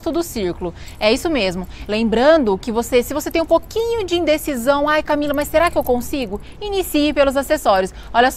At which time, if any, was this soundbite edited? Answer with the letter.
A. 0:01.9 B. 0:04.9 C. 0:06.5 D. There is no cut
A